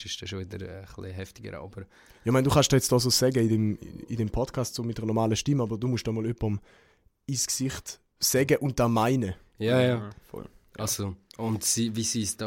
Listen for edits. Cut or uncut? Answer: cut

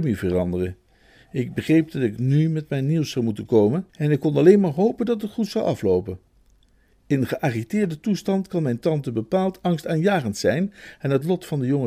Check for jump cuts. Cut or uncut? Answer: cut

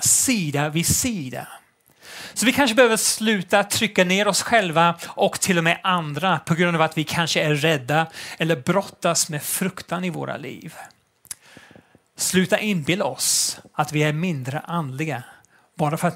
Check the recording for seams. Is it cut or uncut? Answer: uncut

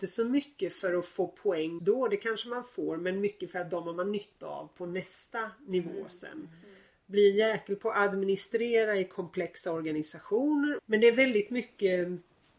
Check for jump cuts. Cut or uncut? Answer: cut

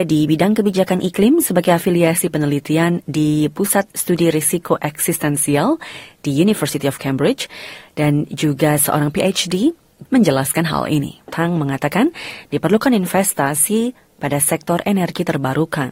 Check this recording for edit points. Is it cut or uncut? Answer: cut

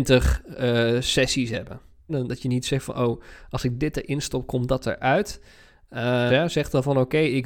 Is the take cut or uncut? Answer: cut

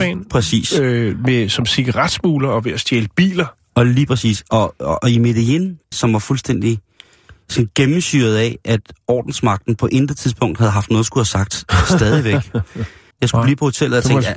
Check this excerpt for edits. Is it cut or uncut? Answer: cut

